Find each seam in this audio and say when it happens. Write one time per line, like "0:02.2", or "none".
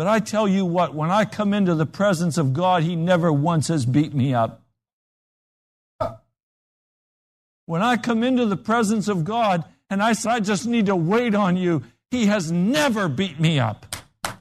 0:10.3